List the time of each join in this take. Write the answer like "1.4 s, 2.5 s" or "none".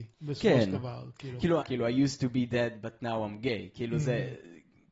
1.6 s